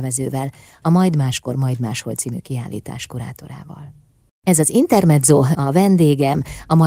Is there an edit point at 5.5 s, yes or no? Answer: yes